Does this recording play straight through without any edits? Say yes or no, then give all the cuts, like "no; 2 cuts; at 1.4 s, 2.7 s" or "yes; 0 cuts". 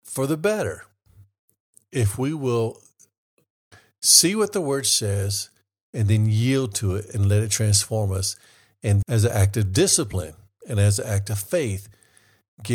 no; 2 cuts; at 9.0 s, 10.6 s